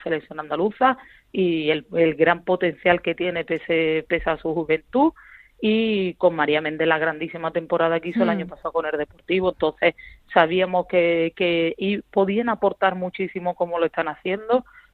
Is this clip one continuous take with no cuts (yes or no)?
yes